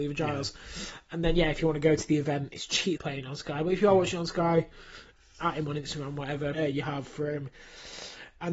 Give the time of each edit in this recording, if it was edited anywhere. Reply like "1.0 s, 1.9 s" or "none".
3.0 s, 6.5 s